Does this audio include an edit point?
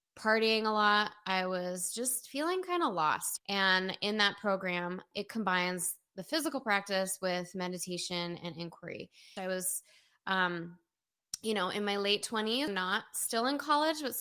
yes; 3 cuts; at 3.4 s, 9.4 s, 12.7 s

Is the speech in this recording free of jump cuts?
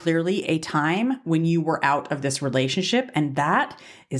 yes; 0 cuts

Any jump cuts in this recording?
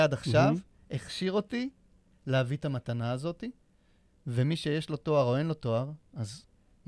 no; 0 cuts

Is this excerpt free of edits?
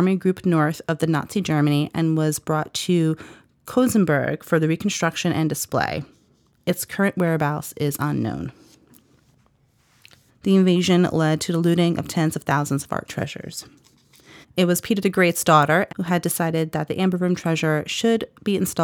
no; 3 cuts; at 10.3 s, 14.4 s, 15.9 s

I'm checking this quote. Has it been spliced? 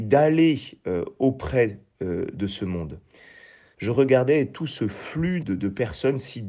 yes; 2 cuts; at 3.7 s, 5.4 s

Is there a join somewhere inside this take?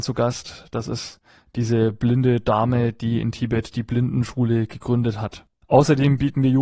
yes; 1 cut; at 5.6 s

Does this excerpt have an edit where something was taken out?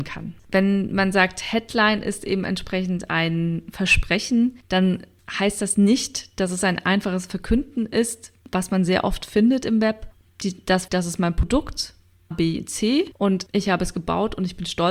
yes; 2 cuts; at 10.9 s, 12.3 s

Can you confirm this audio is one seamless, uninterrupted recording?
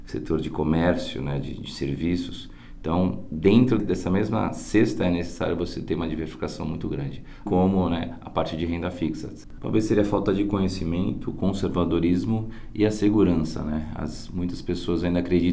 no; 2 cuts; at 7.5 s, 9.6 s

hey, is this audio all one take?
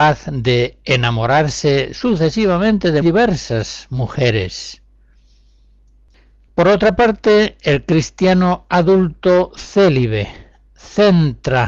no; 1 cut; at 3.0 s

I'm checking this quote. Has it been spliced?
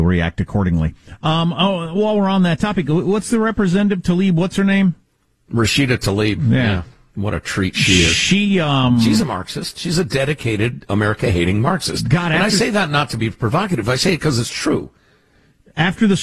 no; 0 cuts

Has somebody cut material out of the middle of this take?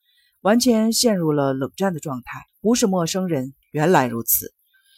yes; 2 cuts; at 2.5 s, 3.6 s

